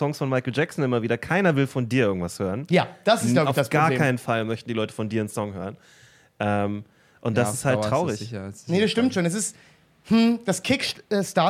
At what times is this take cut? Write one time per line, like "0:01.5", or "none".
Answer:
none